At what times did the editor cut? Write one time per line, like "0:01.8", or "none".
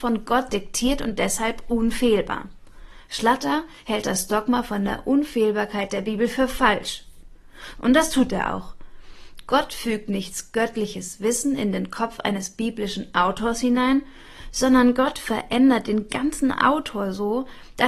0:07.7